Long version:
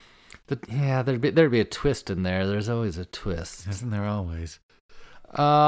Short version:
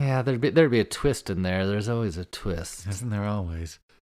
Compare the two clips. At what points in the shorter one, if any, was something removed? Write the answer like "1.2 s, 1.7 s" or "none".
none